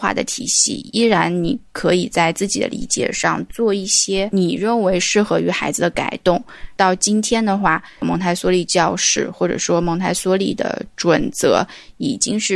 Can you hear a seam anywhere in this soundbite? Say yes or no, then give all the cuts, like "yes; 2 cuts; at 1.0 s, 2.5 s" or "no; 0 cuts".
yes; 1 cut; at 6.8 s